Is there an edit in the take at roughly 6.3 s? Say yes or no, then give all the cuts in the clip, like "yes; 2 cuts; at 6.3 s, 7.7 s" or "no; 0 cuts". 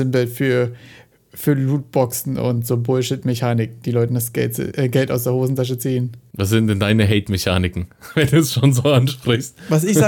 no; 0 cuts